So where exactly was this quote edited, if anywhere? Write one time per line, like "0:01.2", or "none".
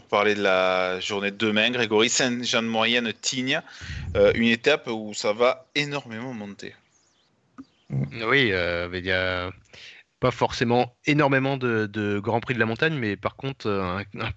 none